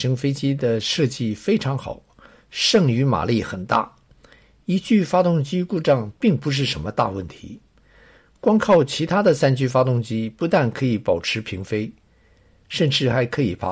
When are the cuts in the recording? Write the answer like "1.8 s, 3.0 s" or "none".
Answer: none